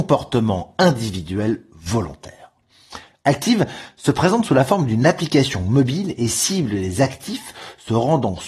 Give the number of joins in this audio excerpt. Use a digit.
0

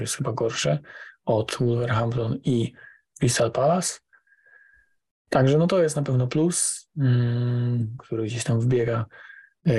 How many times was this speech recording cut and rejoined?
2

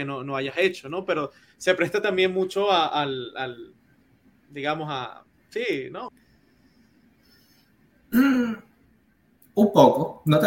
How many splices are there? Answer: 1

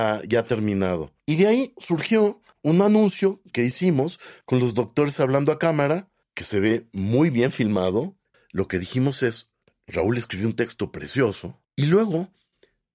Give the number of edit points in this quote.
2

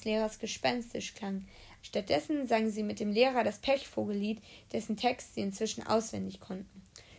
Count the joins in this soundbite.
1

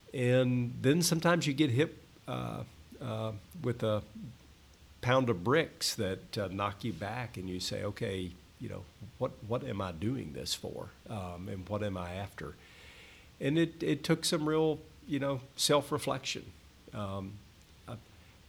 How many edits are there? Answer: 0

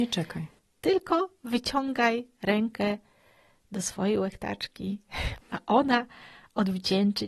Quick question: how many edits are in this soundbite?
1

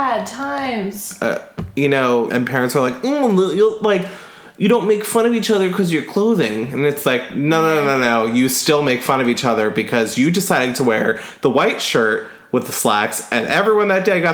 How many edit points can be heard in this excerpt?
1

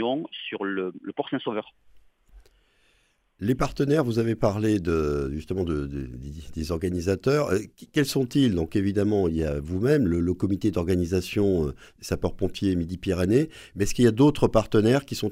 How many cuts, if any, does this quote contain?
0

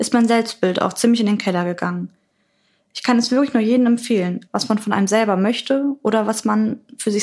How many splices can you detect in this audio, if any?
1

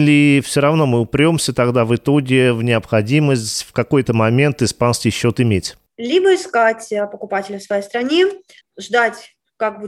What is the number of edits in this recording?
2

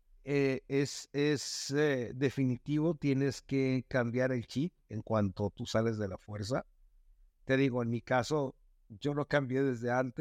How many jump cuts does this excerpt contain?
0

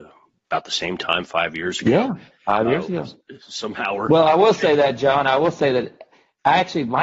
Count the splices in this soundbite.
0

